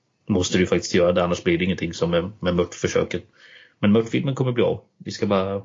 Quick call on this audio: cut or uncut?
uncut